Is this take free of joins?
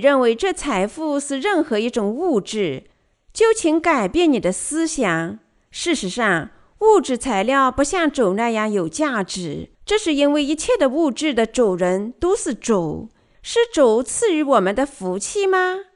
no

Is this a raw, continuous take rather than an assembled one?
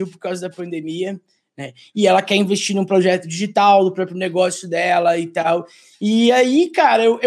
yes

